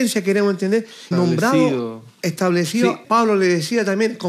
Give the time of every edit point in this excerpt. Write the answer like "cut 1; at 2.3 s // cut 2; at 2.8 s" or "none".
cut 1; at 1.1 s // cut 2; at 3.0 s